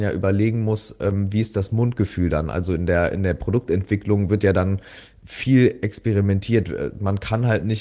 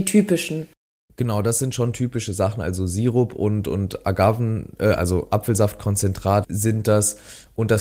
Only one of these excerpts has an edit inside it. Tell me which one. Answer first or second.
second